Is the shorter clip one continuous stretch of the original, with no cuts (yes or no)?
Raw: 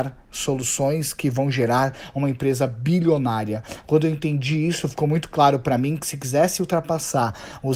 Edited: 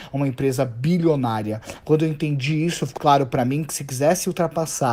no